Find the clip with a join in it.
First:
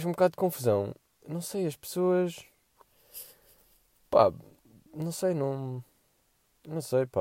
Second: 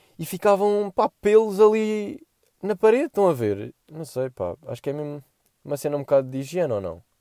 second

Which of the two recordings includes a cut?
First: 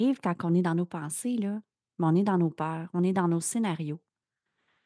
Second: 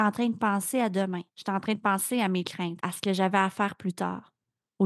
second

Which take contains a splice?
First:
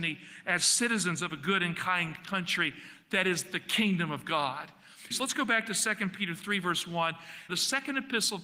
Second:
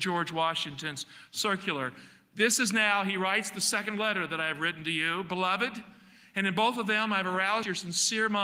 first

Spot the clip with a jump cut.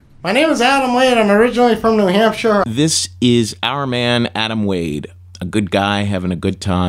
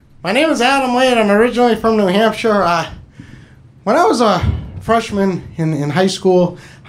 first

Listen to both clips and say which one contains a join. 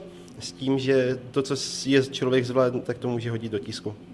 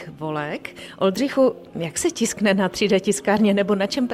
first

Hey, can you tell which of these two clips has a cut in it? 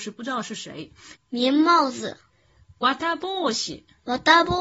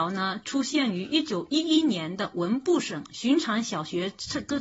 first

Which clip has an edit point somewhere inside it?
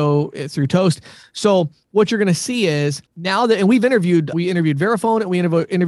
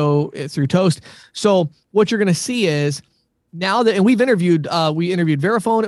first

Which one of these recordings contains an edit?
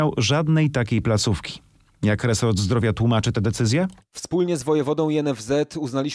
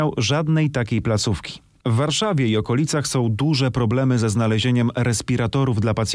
second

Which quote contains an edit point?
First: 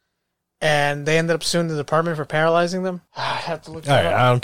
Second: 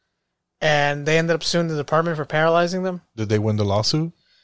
first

